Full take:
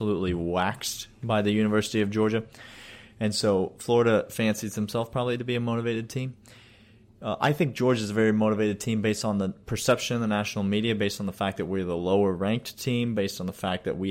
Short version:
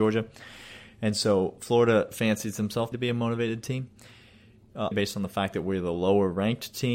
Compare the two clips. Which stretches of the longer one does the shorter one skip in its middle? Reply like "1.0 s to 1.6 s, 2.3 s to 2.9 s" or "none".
5.1 s to 5.4 s, 7.4 s to 11.0 s

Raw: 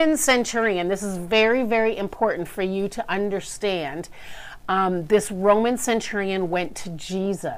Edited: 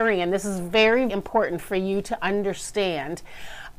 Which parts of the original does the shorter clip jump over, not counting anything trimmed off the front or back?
1.7 s to 2.0 s

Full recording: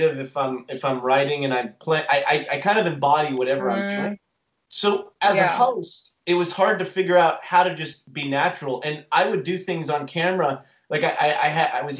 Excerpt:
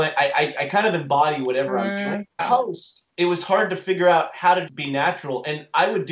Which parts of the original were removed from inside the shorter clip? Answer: 4.3 s to 5.5 s, 7.8 s to 8.0 s

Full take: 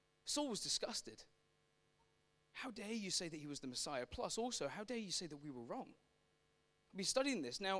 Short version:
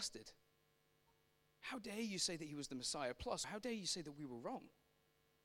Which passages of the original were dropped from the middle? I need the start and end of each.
4.4 s to 4.7 s

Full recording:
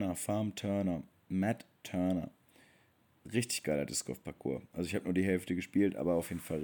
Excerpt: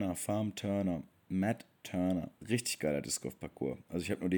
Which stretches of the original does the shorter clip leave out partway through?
2.4 s to 3.2 s

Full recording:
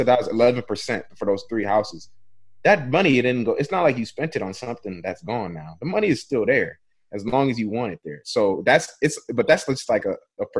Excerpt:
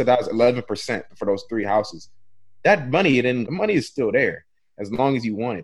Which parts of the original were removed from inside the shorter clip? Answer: 3.5 s to 5.8 s

